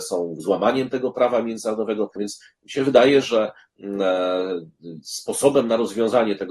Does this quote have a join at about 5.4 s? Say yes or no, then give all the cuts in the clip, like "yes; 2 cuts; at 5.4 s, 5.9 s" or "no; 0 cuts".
no; 1 cut; at 2.2 s